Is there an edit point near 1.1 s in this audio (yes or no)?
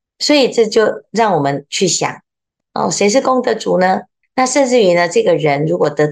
no